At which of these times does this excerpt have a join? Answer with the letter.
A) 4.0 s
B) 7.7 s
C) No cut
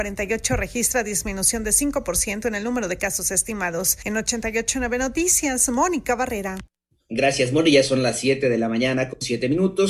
C